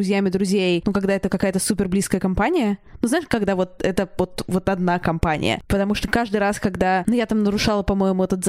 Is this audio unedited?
yes; 0 cuts

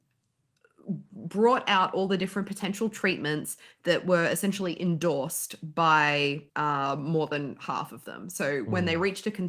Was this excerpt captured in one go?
no; 1 cut; at 6.5 s

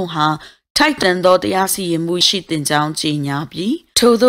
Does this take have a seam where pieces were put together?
yes; 1 cut; at 2.2 s

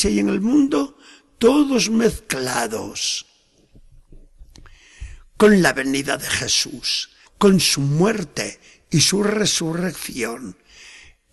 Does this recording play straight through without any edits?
no; 1 cut; at 7.3 s

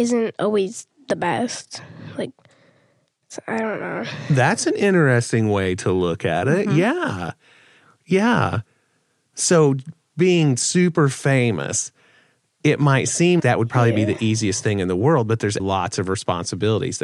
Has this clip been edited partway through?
yes; 2 cuts; at 13.4 s, 15.6 s

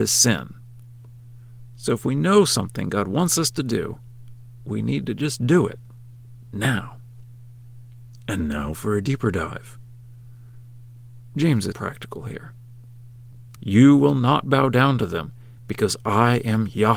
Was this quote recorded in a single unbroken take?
no; 3 cuts; at 11.7 s, 13.6 s, 15.6 s

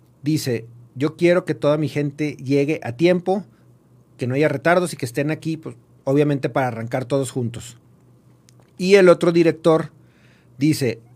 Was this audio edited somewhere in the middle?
no; 0 cuts

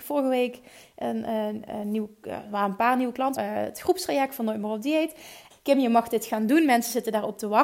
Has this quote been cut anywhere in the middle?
yes; 2 cuts; at 3.4 s, 5.5 s

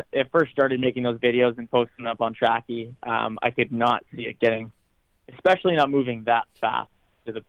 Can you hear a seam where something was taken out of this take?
no; 0 cuts

